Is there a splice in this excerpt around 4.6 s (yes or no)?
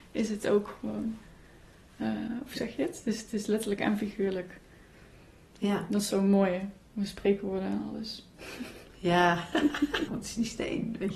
no